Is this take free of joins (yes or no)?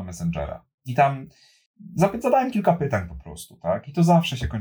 yes